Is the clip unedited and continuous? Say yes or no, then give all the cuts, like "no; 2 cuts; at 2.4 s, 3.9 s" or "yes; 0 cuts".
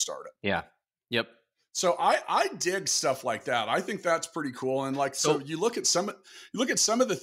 yes; 0 cuts